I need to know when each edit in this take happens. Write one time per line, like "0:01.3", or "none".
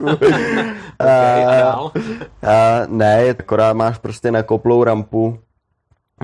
0:03.4